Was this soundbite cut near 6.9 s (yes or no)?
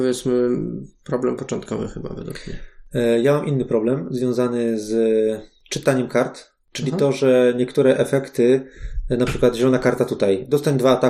no